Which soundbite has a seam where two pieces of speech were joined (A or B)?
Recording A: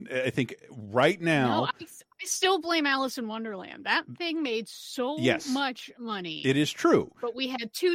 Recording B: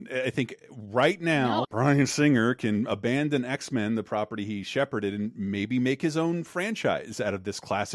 B